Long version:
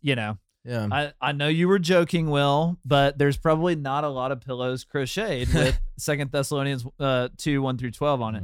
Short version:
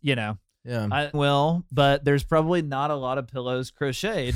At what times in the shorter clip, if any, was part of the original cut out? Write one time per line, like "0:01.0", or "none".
0:01.1